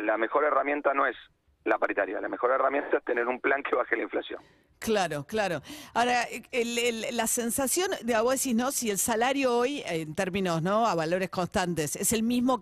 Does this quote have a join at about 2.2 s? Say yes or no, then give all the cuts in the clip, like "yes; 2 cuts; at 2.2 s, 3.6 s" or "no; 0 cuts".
no; 0 cuts